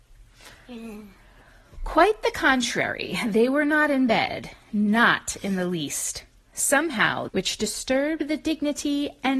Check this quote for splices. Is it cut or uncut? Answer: cut